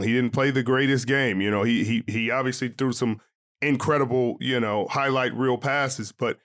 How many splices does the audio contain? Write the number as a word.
zero